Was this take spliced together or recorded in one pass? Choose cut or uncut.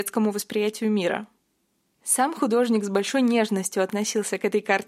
uncut